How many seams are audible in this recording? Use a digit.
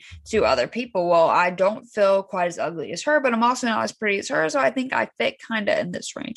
0